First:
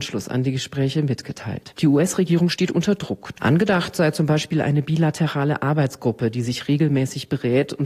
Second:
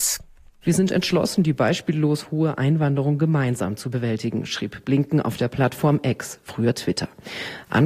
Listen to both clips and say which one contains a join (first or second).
first